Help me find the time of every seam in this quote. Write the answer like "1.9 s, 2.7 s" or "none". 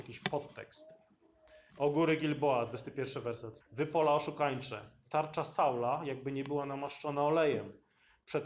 1.7 s, 3.6 s, 5.0 s